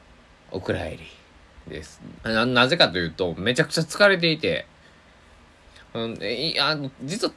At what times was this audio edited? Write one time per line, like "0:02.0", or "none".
0:02.2